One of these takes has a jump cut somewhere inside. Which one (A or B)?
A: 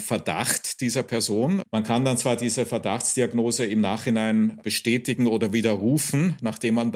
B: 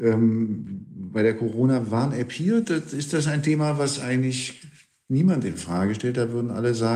A